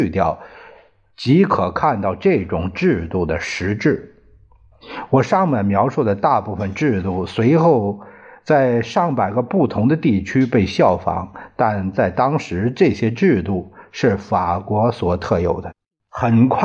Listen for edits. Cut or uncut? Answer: uncut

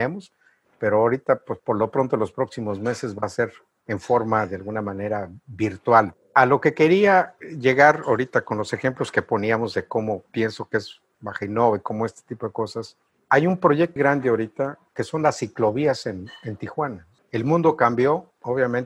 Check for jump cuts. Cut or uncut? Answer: cut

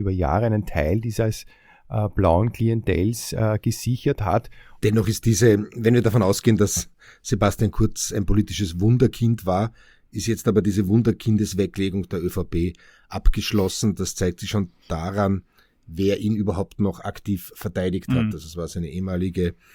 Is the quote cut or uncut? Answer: cut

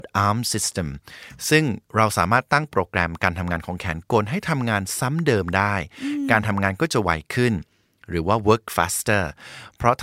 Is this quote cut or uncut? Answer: uncut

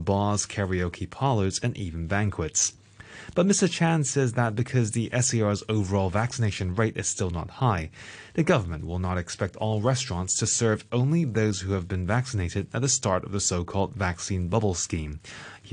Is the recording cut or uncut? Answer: uncut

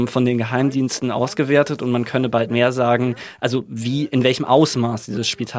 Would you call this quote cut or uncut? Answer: uncut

